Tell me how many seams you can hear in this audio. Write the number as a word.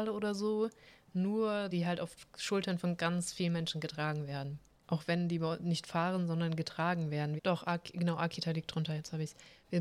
three